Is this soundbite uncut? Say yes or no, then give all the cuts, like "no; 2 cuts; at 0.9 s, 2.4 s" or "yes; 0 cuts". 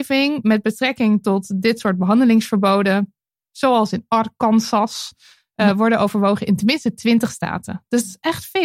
yes; 0 cuts